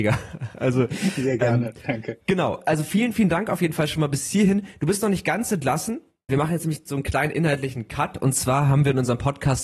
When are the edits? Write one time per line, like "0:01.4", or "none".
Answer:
0:02.2
0:06.3